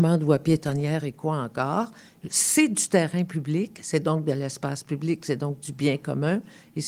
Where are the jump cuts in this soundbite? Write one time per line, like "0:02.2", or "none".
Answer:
none